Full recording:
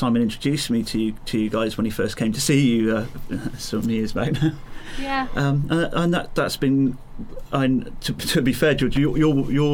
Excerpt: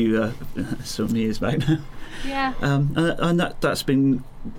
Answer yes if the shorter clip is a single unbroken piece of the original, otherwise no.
yes